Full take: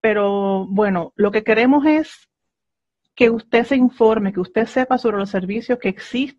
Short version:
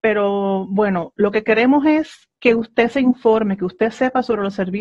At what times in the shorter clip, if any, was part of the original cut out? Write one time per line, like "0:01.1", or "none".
0:02.4